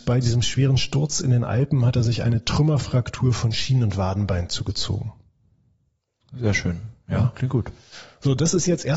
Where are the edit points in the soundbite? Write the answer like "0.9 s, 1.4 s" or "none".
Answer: none